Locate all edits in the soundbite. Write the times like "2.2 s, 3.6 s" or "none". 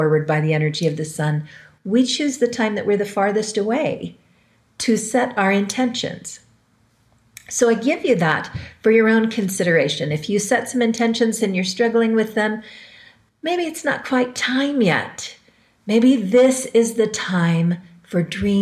none